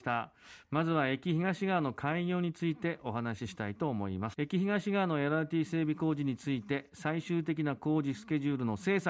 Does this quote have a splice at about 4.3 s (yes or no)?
yes